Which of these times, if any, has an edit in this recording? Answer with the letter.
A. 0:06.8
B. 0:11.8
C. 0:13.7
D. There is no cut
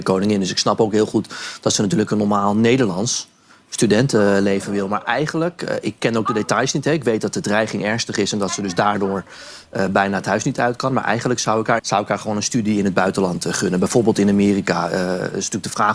B